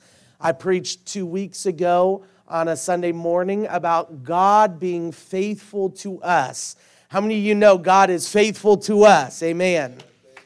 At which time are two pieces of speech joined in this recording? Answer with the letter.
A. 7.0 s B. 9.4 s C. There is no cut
C